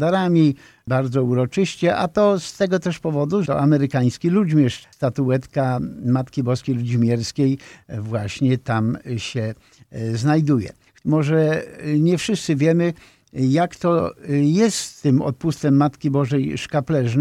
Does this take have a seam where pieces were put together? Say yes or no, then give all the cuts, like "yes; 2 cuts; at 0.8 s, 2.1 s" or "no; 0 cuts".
yes; 2 cuts; at 3.5 s, 4.8 s